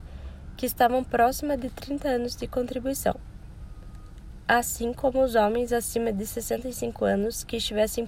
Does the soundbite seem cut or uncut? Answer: uncut